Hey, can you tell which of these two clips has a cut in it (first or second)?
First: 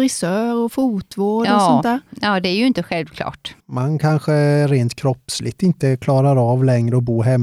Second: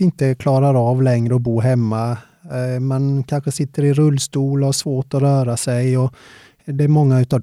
first